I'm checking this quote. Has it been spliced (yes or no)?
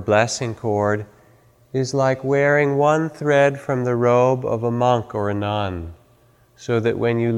no